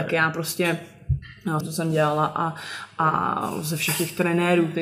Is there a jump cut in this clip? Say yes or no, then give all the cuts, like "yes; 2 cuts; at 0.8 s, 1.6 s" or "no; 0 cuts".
yes; 1 cut; at 1.6 s